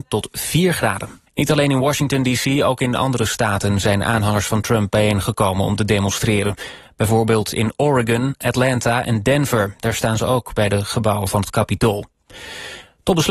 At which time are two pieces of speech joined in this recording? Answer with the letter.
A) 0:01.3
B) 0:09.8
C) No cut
A